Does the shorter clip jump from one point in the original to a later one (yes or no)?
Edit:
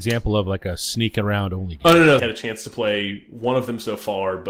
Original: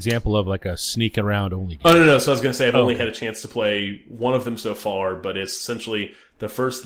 yes